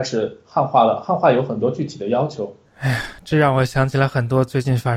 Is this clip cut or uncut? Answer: cut